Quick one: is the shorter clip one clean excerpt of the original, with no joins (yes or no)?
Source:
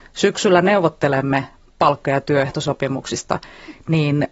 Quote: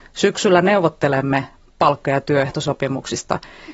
yes